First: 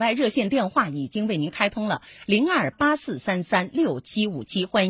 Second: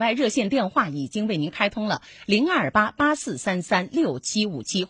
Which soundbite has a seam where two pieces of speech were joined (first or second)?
first